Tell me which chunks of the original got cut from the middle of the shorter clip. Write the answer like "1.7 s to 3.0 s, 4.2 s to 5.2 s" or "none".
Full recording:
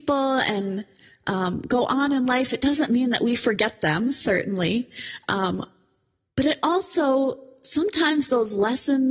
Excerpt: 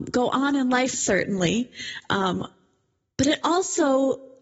2.5 s to 4.1 s